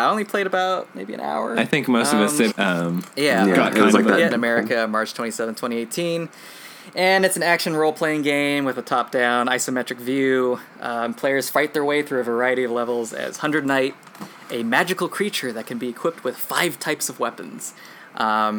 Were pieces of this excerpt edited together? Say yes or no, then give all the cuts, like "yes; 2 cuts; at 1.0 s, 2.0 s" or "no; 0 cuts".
yes; 2 cuts; at 2.5 s, 4.3 s